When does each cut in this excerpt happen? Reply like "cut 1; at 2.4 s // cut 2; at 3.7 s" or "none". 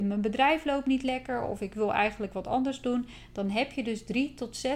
none